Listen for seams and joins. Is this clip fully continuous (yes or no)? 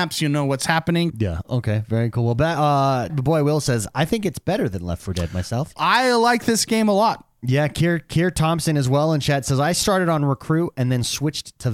no